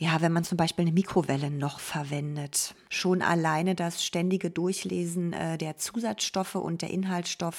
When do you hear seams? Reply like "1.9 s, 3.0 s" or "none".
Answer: 2.9 s